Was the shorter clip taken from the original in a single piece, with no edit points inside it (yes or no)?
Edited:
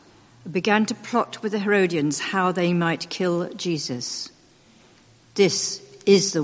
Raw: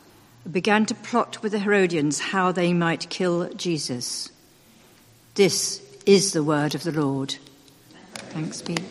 yes